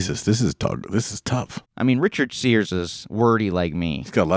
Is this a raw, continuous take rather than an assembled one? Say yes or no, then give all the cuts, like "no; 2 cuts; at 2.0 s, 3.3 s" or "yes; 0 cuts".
yes; 0 cuts